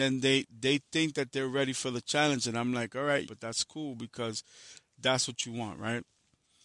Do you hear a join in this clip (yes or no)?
yes